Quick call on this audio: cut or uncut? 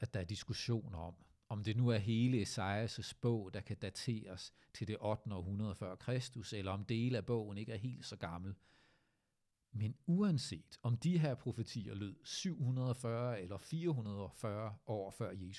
uncut